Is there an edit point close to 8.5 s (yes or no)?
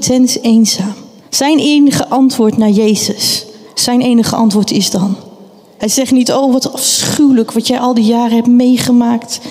no